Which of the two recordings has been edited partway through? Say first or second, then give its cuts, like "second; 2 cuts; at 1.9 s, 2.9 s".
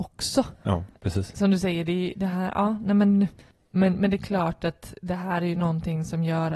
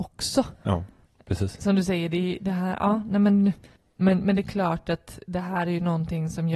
first; 1 cut; at 1.0 s